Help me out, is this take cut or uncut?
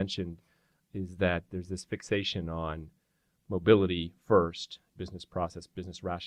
cut